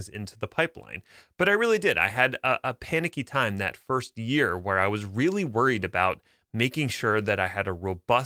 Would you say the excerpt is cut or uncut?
uncut